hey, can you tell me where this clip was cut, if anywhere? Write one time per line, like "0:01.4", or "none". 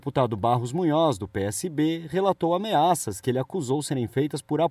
none